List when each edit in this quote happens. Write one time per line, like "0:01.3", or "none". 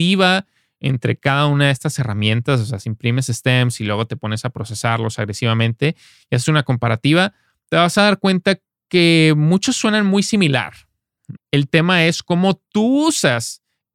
0:11.4